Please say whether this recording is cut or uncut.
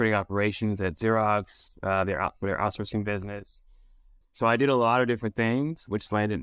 cut